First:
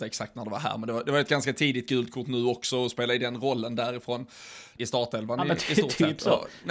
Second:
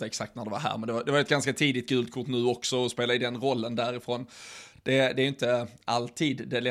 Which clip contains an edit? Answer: first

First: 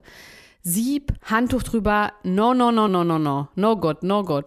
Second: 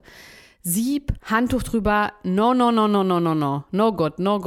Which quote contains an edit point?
first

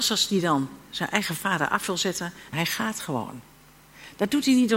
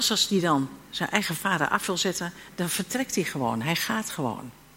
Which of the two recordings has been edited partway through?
first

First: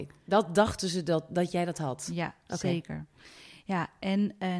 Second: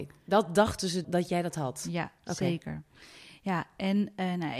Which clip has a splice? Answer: second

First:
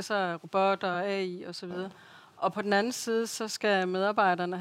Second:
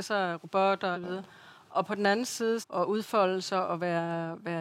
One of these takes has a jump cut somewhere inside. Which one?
second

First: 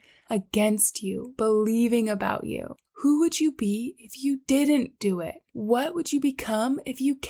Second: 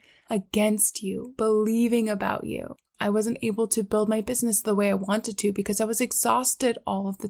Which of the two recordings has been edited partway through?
second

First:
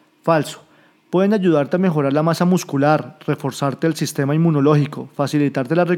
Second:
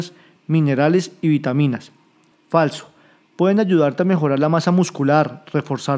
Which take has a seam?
second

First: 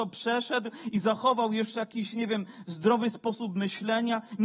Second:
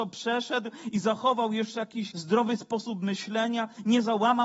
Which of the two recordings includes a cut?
second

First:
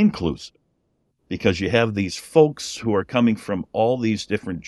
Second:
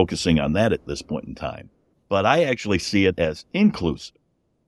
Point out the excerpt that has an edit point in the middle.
second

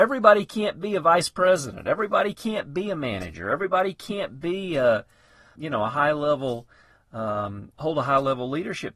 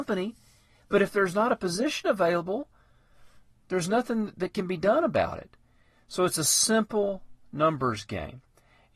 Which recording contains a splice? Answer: first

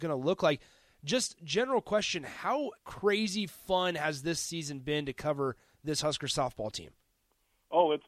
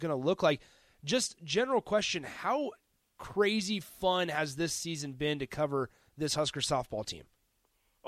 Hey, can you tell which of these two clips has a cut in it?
first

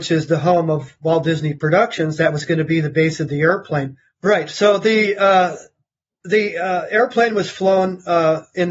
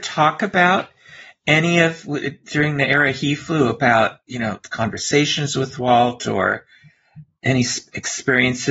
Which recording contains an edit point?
first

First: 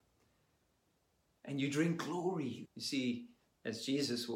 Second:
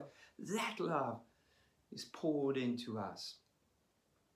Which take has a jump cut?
first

